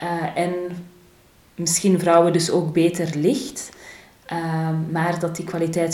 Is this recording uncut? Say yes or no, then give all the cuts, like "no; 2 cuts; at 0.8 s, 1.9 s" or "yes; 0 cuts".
yes; 0 cuts